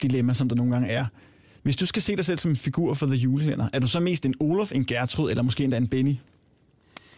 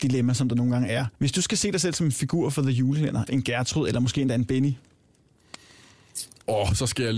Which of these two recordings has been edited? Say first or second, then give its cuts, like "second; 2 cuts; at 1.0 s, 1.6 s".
second; 2 cuts; at 1.1 s, 3.3 s